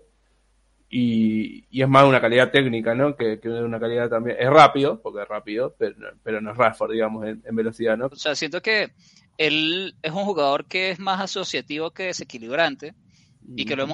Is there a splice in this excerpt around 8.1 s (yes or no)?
yes